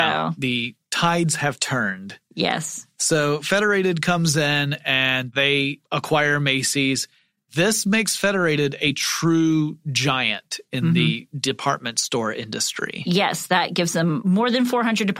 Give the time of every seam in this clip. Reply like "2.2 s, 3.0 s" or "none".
none